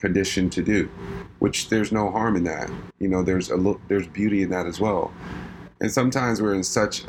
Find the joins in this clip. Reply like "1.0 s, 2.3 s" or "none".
2.9 s, 5.8 s